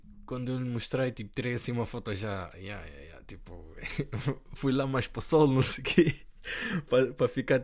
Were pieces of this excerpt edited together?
no; 0 cuts

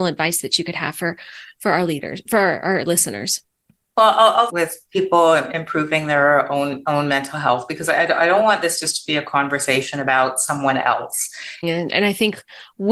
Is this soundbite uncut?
no; 2 cuts; at 4.5 s, 11.6 s

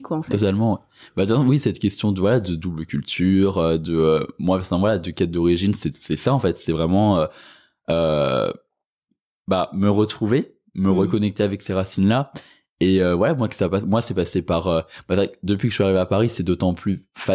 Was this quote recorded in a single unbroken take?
yes; 0 cuts

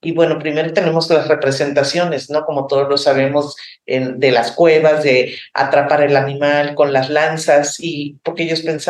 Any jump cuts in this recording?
no; 0 cuts

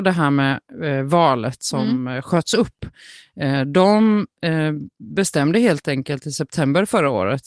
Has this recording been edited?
no; 0 cuts

